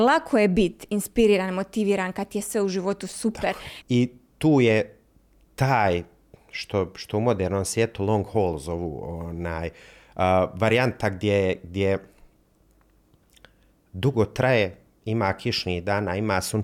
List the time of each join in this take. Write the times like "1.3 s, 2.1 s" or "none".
3.8 s